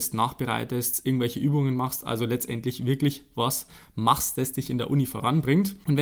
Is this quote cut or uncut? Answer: uncut